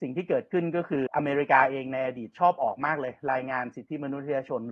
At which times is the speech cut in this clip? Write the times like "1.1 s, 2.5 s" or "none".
1.1 s

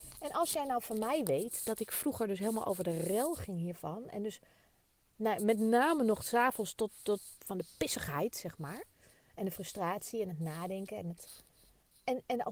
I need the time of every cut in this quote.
7.4 s

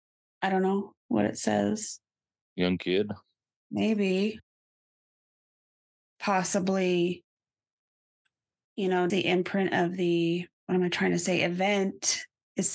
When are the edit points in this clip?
9.1 s, 10.5 s

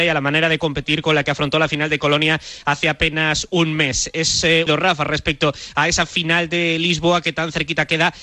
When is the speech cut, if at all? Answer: 4.7 s

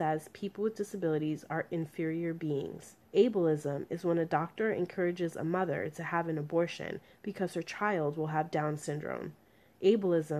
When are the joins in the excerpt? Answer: 3.1 s

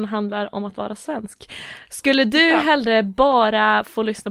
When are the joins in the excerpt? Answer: none

